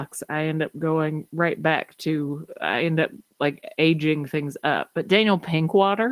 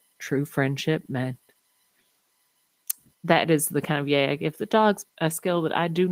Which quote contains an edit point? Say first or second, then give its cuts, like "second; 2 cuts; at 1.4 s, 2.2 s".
second; 2 cuts; at 3.1 s, 5.0 s